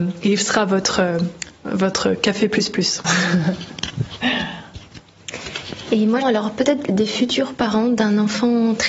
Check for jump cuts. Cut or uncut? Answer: cut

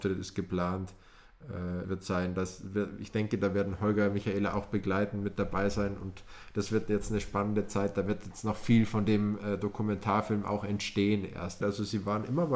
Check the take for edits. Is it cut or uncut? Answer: cut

